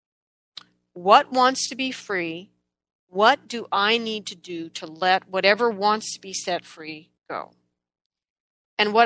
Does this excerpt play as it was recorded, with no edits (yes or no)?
no